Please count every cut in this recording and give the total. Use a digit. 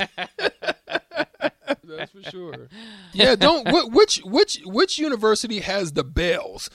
2